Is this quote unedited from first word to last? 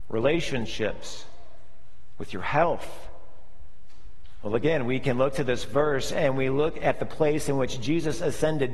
yes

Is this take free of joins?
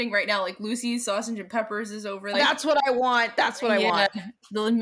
no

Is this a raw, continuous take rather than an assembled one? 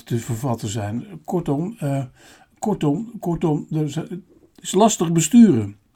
yes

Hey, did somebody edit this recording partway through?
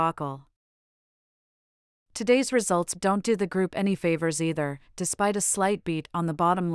yes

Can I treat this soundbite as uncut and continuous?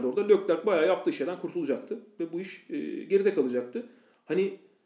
yes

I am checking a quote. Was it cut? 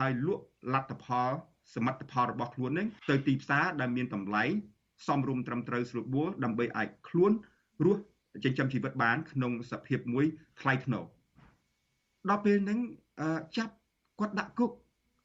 yes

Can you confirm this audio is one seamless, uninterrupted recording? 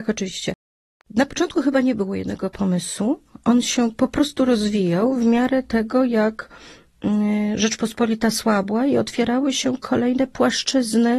yes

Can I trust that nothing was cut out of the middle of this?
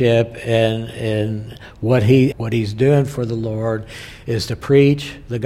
no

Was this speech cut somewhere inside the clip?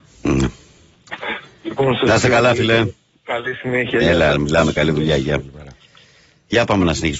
no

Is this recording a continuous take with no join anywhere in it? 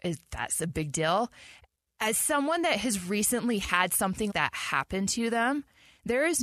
no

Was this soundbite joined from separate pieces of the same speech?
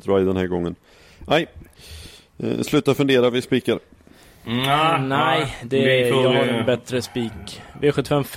no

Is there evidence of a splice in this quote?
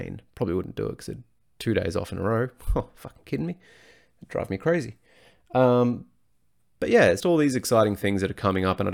yes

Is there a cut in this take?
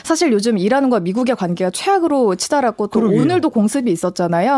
no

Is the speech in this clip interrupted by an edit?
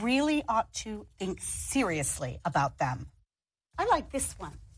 no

